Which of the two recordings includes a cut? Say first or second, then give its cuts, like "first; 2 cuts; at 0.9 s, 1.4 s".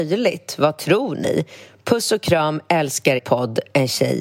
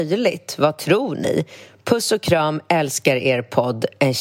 first; 1 cut; at 3.2 s